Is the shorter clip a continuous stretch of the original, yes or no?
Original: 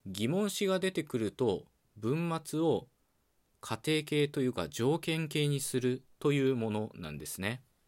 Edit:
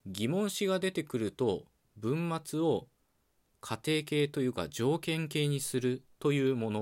yes